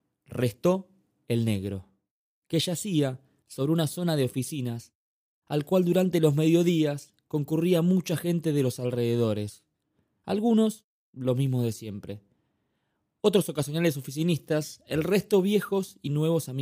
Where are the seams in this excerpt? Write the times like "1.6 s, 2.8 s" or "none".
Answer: none